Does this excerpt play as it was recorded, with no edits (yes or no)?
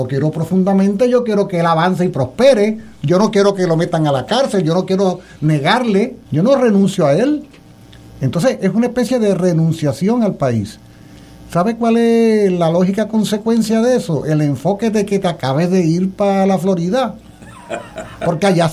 no